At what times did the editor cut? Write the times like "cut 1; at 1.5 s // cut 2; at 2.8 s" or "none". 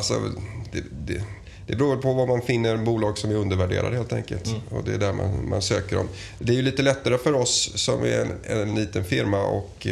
none